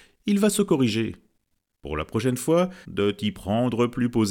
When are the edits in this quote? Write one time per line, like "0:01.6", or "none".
0:01.7
0:02.8

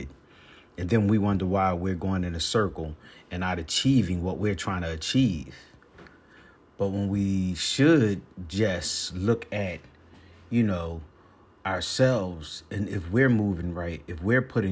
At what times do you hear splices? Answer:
none

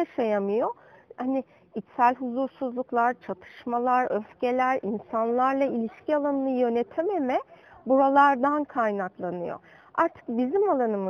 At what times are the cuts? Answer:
none

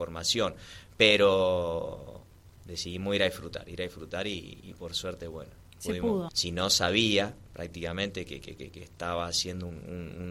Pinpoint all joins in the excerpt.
0:06.3

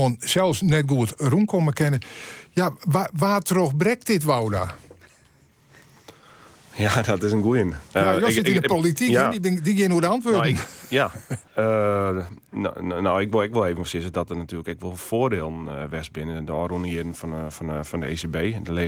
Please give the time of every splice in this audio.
0:11.5

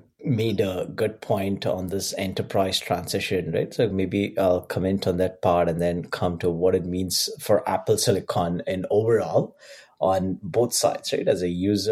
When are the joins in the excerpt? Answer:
none

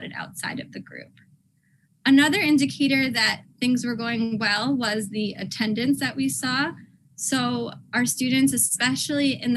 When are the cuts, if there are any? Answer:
none

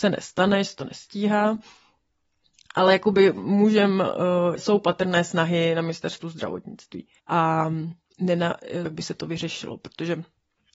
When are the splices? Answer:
0:04.6
0:07.2
0:08.9

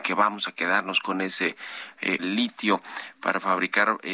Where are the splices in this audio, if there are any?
0:02.2

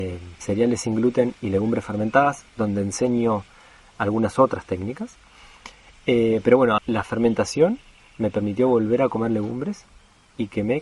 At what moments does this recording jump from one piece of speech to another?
0:06.8

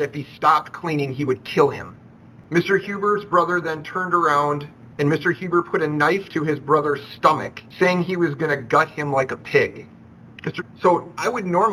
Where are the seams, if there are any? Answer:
0:02.5
0:10.6

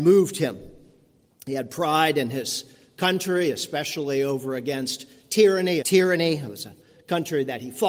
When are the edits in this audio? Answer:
0:05.8

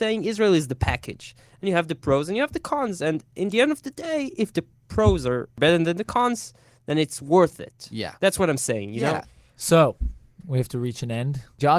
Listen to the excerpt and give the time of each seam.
0:10.4

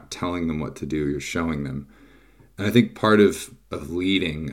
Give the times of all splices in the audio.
none

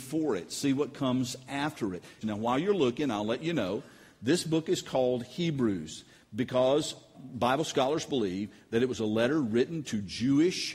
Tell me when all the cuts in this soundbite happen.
0:02.2
0:07.1

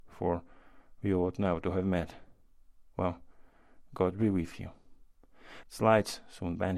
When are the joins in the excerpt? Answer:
0:05.6

